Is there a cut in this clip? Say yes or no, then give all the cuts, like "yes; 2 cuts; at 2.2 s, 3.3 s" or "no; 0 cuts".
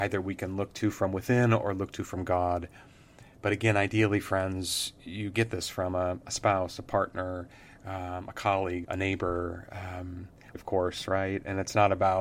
yes; 2 cuts; at 8.8 s, 10.5 s